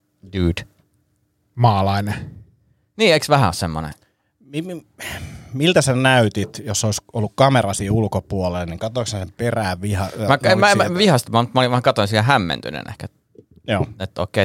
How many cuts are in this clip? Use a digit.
0